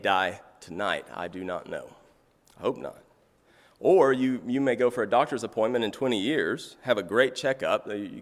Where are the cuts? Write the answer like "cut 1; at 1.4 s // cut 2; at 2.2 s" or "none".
none